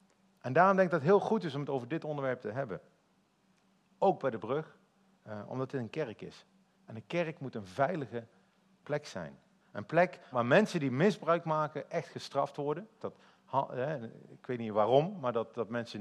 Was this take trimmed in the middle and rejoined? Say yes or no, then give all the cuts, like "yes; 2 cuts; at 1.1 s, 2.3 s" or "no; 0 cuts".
yes; 2 cuts; at 10.3 s, 13.0 s